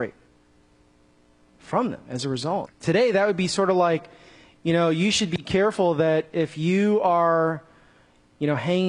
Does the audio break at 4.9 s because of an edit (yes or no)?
no